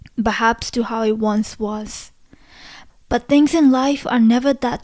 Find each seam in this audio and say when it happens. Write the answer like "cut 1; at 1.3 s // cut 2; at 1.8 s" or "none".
cut 1; at 2.9 s